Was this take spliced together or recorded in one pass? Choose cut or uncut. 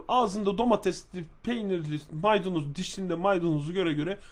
uncut